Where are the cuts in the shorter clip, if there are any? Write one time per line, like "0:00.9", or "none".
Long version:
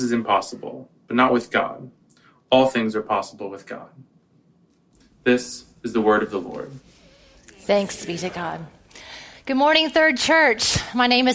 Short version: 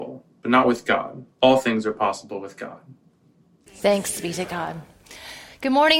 0:01.3
0:03.7